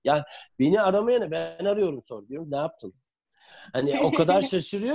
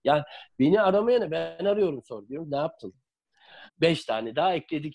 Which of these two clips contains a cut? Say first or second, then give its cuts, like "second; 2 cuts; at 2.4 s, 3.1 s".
second; 1 cut; at 3.7 s